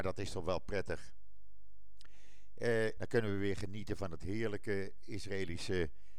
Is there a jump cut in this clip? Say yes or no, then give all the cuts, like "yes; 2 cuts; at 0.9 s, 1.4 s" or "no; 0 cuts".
yes; 1 cut; at 3.0 s